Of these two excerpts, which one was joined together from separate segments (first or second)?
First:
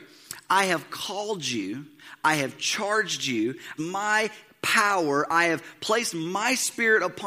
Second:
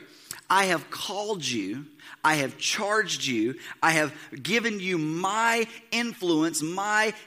first